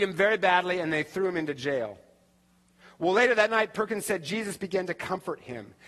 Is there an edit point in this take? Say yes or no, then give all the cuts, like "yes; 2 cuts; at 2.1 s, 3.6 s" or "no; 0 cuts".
no; 0 cuts